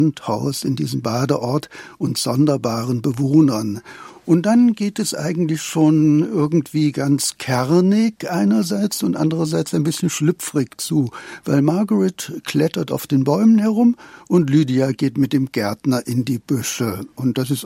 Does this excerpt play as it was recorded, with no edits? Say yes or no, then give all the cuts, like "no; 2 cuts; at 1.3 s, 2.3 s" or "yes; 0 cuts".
yes; 0 cuts